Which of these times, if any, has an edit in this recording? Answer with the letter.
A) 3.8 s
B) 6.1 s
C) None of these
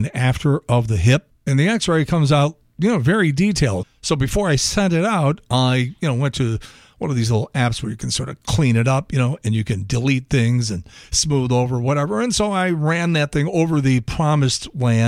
A